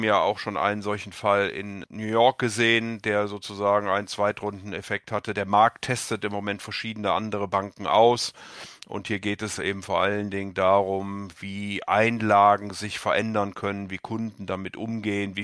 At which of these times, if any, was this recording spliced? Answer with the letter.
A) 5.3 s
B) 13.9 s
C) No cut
C